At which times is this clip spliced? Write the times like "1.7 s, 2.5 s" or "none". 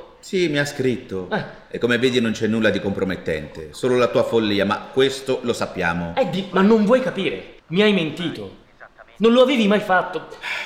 7.6 s